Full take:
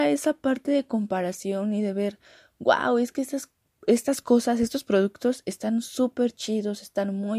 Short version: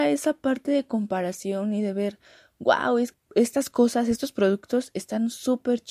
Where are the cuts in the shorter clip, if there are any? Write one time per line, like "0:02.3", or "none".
0:03.1